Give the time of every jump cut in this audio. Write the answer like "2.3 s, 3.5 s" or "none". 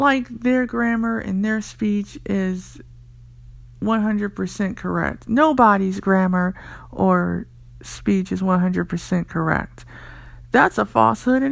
none